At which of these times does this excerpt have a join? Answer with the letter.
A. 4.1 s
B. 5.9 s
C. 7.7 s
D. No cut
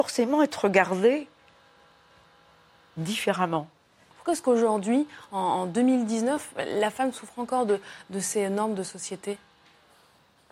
A